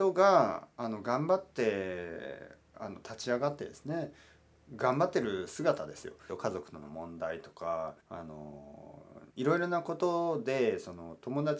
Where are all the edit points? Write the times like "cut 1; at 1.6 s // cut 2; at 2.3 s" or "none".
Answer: cut 1; at 6.3 s // cut 2; at 8.0 s // cut 3; at 9.3 s